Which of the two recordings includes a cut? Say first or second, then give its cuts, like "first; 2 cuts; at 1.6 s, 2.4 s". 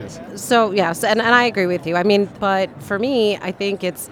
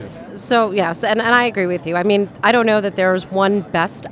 first; 1 cut; at 2.4 s